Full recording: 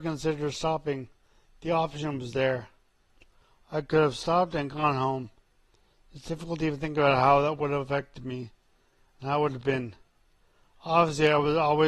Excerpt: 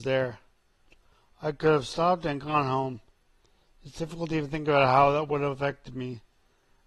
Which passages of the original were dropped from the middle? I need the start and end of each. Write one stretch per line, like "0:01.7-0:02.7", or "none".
none